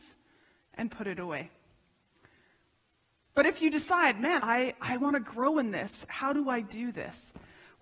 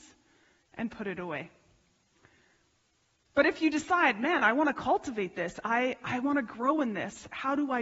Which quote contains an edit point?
first; 1 cut; at 4.4 s

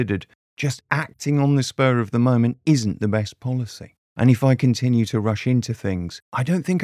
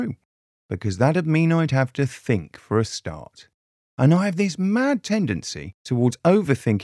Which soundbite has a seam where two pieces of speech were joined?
first; 1 cut; at 4.0 s

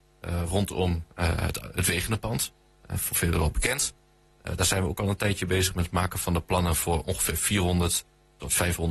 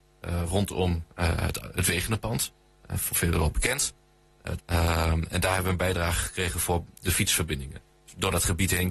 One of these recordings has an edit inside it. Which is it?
second; 1 cut; at 4.6 s

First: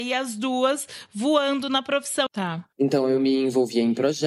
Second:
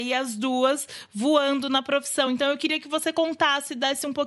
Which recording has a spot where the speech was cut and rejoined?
first; 1 cut; at 2.3 s

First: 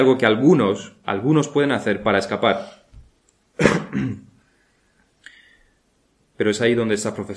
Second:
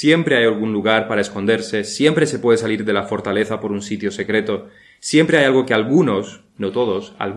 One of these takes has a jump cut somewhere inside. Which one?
first; 1 cut; at 1.0 s

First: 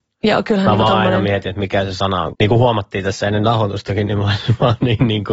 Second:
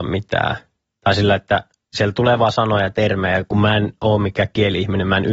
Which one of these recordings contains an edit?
first; 1 cut; at 2.3 s

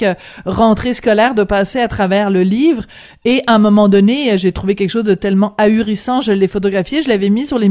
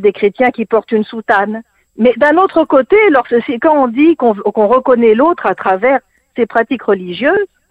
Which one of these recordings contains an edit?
second; 1 cut; at 1.9 s

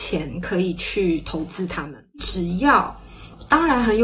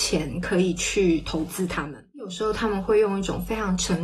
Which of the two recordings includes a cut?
first; 1 cut; at 2.2 s

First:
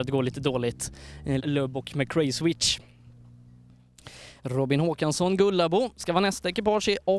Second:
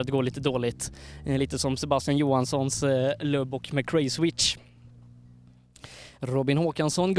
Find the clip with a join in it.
first; 1 cut; at 1.4 s

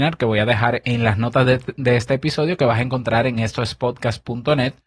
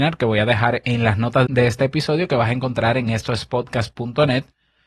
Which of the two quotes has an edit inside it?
second; 1 cut; at 1.5 s

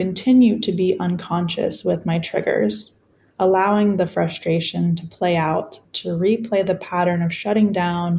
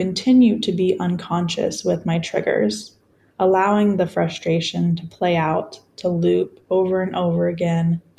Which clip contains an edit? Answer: first; 1 cut; at 5.8 s

